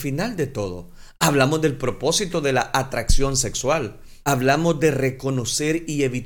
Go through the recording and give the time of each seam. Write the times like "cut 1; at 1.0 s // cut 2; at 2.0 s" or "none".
cut 1; at 4.2 s